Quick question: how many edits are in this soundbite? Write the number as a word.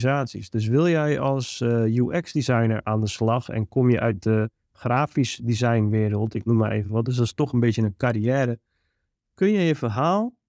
one